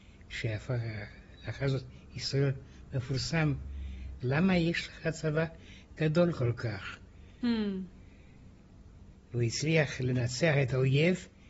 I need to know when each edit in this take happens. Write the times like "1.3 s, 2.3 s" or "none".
4.2 s, 7.4 s, 9.1 s